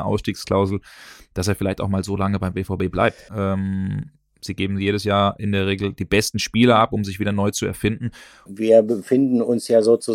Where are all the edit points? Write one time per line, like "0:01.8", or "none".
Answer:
0:03.3
0:08.5